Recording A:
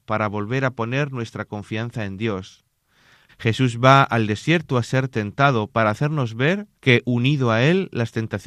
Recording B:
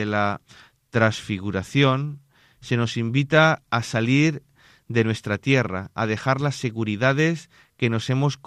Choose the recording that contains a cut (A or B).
A